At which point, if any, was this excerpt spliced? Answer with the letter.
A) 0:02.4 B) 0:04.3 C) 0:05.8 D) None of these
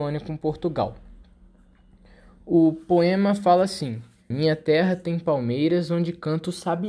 B